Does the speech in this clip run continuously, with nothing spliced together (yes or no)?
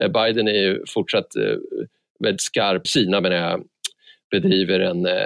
no